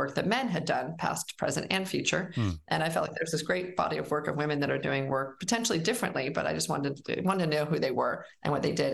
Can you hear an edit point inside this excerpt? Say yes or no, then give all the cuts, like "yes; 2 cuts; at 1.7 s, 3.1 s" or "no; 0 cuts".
no; 0 cuts